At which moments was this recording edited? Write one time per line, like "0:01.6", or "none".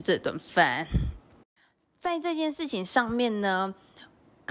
none